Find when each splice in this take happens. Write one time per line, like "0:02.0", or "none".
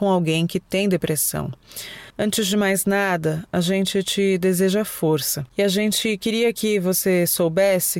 0:02.1